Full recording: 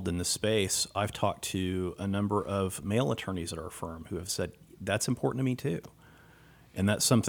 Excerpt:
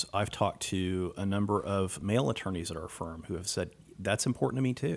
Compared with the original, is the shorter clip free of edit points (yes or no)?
yes